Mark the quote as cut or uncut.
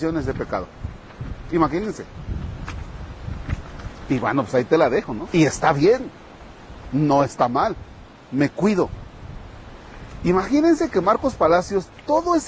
cut